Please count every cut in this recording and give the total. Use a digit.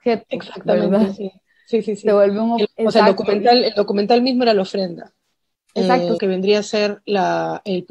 2